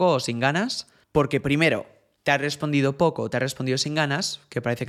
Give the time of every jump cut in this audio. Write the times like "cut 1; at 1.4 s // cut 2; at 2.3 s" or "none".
cut 1; at 1.0 s